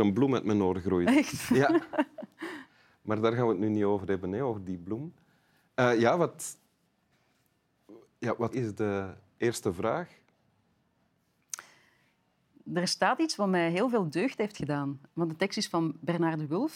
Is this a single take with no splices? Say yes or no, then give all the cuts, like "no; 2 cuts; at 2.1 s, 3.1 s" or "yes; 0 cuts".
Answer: no; 2 cuts; at 8.5 s, 15.0 s